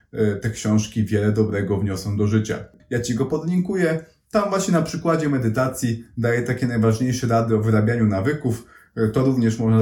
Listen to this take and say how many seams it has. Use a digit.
1